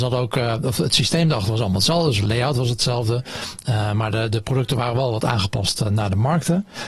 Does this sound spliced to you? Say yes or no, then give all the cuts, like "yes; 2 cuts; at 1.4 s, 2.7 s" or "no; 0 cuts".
no; 0 cuts